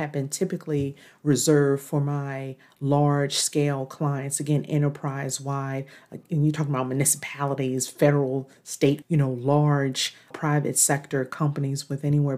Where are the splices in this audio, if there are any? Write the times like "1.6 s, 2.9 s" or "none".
9.0 s, 10.3 s